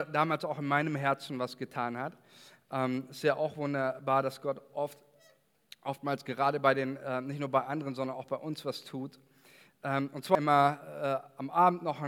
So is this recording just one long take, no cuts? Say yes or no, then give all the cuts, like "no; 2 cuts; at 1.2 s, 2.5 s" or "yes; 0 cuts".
yes; 0 cuts